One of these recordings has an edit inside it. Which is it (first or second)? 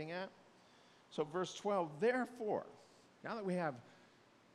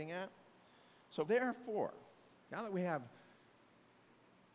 second